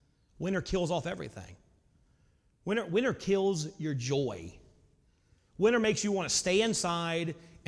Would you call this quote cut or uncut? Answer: uncut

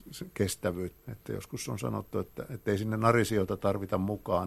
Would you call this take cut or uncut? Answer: cut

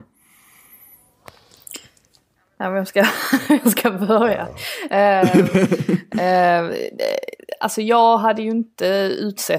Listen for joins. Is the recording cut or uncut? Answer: uncut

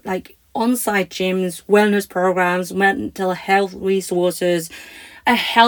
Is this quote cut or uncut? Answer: uncut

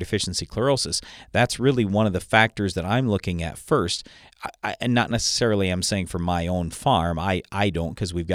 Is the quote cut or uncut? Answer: uncut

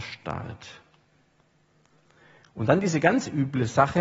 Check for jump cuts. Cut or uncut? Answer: uncut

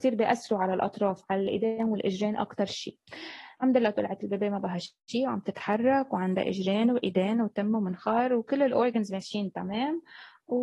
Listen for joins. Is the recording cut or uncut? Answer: uncut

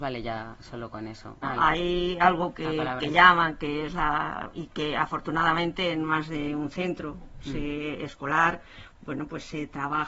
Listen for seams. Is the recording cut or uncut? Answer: cut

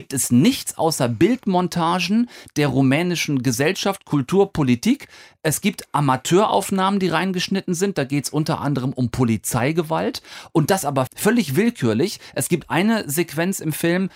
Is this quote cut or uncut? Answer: cut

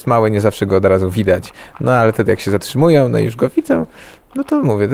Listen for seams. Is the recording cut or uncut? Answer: uncut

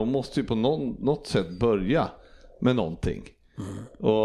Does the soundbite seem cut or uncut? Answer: uncut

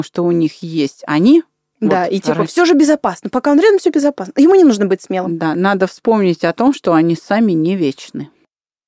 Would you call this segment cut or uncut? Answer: uncut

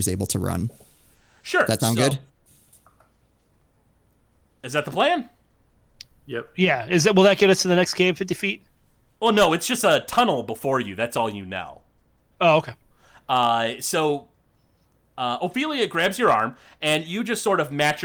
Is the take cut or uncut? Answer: uncut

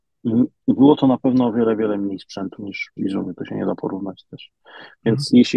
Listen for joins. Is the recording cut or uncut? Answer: cut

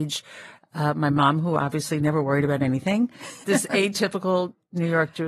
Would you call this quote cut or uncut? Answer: cut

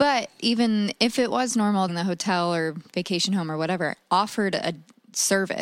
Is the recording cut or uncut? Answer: cut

